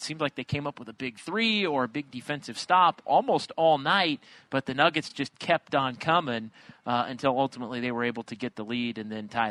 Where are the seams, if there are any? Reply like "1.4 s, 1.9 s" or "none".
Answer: none